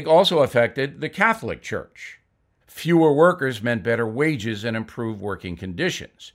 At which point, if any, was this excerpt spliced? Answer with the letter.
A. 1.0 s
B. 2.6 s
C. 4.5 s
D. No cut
B